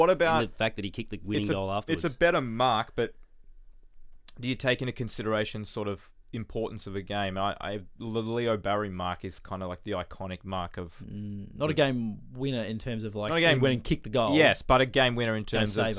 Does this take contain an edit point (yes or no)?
no